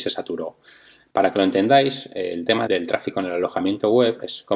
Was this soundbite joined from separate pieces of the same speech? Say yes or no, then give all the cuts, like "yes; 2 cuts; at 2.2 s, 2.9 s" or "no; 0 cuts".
yes; 1 cut; at 2.7 s